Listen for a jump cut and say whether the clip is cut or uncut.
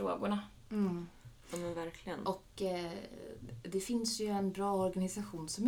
uncut